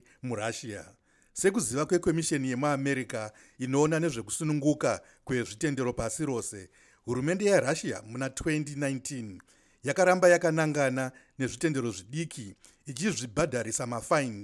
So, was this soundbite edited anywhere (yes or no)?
no